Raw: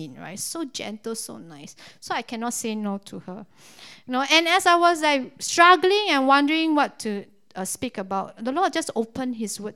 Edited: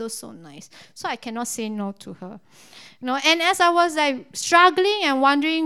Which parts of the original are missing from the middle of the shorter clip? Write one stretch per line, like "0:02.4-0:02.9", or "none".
none